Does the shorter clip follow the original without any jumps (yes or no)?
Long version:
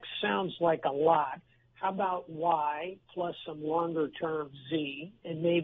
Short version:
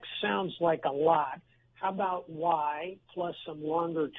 yes